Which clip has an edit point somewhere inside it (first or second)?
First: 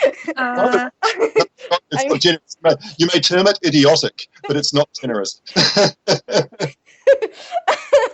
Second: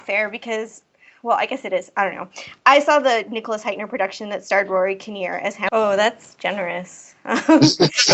second